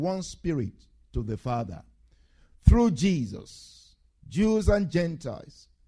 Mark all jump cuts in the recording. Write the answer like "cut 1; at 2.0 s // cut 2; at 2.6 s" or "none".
none